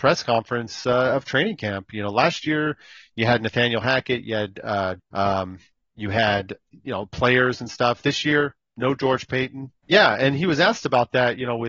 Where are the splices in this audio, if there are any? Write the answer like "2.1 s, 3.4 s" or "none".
5.0 s, 9.8 s